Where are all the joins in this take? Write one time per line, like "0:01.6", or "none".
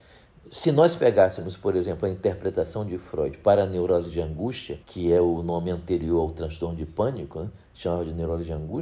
0:04.8